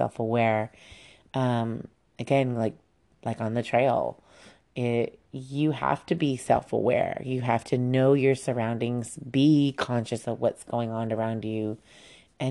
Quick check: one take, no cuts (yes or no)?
yes